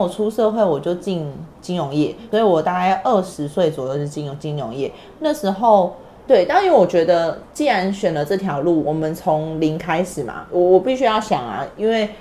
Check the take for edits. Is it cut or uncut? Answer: cut